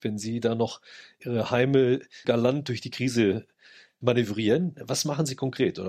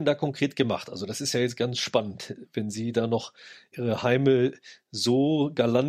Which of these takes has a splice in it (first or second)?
first